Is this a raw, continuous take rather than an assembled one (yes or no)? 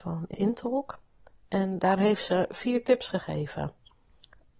yes